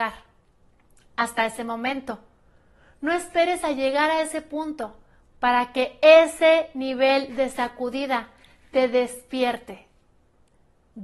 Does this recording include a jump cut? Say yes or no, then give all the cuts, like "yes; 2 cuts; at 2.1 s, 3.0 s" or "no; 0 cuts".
no; 0 cuts